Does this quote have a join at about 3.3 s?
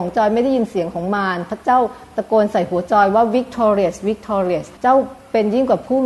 no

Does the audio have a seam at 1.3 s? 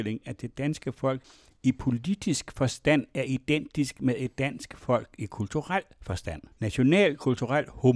no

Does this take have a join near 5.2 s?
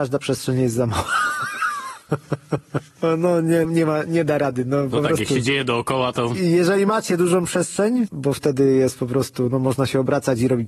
no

